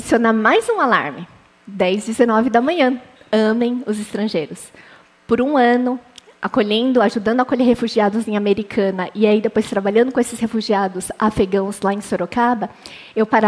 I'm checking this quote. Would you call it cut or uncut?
uncut